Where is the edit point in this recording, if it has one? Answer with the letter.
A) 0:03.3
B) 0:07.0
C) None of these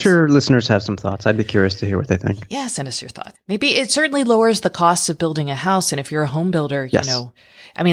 A